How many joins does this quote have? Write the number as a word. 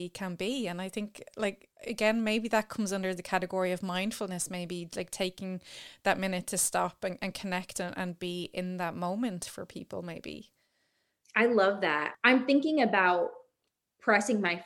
zero